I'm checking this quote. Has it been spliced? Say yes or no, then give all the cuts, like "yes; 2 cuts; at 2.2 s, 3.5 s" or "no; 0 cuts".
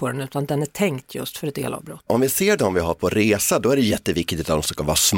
yes; 1 cut; at 2.1 s